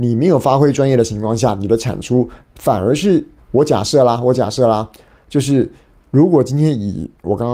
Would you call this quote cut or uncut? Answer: cut